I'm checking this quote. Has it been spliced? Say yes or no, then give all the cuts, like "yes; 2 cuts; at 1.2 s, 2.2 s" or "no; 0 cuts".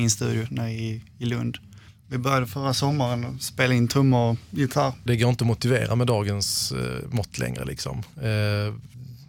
yes; 2 cuts; at 1.9 s, 5.1 s